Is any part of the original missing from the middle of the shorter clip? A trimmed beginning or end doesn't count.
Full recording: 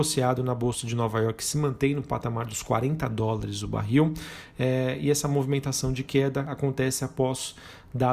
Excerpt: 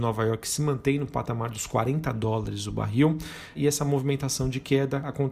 yes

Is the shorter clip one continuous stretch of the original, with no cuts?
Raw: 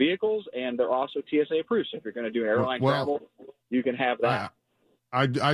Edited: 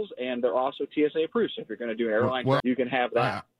no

